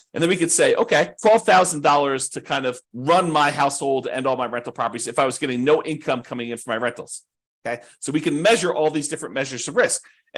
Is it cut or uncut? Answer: cut